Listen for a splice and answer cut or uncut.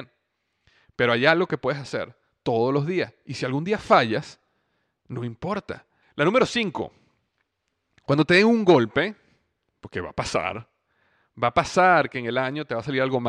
cut